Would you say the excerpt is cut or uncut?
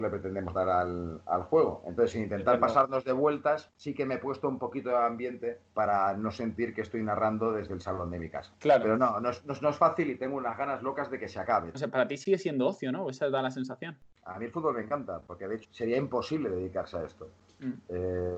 cut